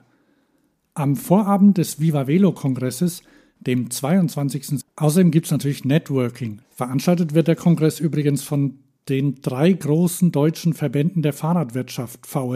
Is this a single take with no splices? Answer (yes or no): no